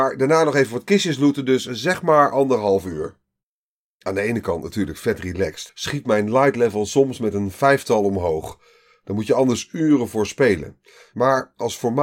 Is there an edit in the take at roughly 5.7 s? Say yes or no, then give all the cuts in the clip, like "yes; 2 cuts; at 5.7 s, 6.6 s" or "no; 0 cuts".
yes; 1 cut; at 5.7 s